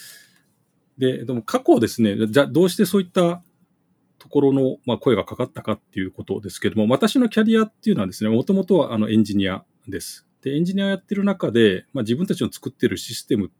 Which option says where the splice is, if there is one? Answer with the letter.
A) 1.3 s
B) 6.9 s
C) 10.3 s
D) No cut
C